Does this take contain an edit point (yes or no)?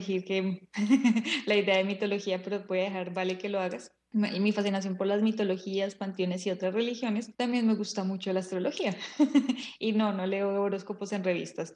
yes